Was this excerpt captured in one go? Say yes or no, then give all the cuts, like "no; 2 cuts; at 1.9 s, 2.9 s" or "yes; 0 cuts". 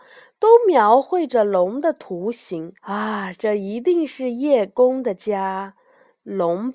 no; 1 cut; at 2.8 s